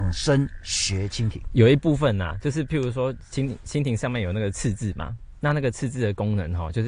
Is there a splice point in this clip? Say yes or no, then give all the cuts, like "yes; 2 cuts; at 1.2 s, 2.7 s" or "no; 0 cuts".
no; 0 cuts